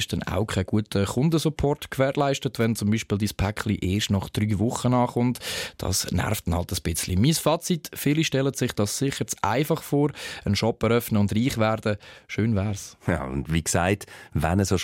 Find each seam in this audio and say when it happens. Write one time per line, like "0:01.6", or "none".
0:13.0